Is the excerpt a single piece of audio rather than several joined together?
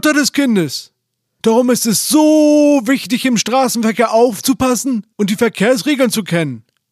no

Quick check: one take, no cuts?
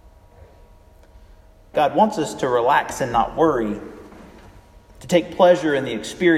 no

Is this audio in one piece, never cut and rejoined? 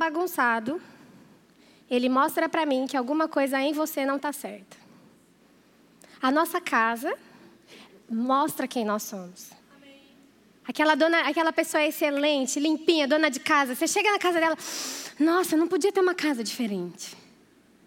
yes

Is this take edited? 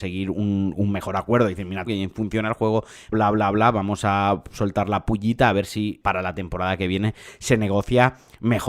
yes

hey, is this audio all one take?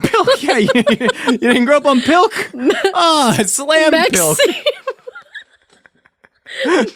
yes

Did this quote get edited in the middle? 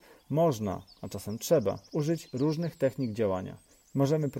no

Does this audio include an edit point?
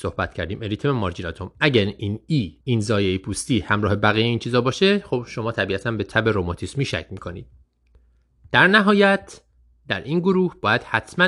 yes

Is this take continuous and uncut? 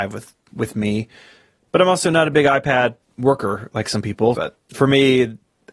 no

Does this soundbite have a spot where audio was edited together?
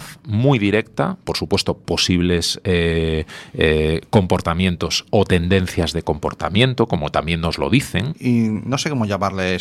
yes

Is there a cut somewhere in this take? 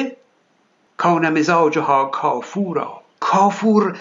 yes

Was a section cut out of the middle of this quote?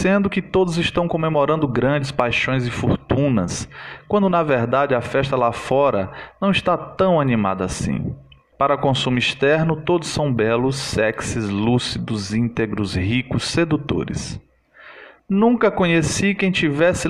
yes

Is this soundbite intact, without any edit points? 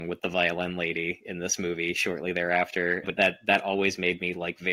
no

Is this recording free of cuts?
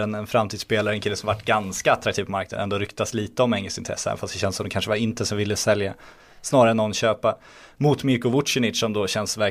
yes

